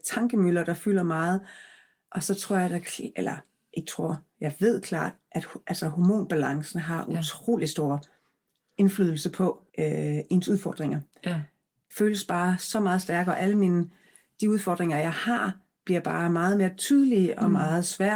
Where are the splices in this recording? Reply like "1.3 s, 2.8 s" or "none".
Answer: 9.7 s, 11.9 s